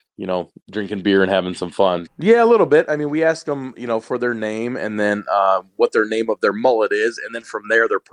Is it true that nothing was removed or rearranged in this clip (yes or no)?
no